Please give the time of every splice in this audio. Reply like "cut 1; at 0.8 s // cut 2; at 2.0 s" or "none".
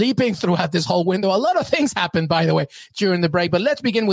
none